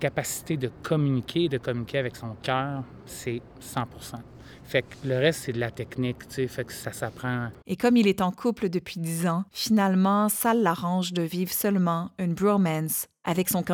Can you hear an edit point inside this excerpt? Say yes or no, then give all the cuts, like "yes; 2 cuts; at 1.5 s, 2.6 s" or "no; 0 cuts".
yes; 2 cuts; at 7.6 s, 9.5 s